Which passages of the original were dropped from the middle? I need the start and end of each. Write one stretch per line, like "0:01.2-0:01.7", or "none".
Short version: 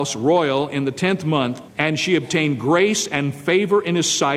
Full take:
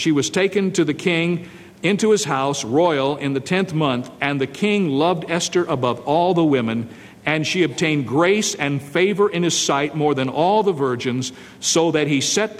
0:04.2-0:07.2